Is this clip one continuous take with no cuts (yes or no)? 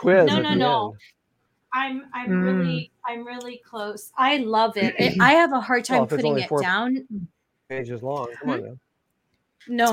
yes